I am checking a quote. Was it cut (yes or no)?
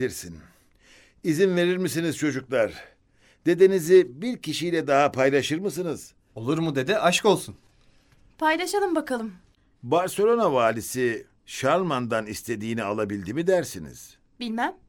yes